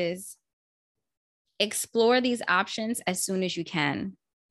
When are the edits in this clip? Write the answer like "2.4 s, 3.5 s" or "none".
none